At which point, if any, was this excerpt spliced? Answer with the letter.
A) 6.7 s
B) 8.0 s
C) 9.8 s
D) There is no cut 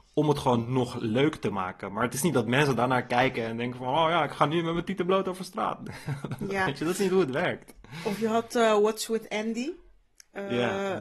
D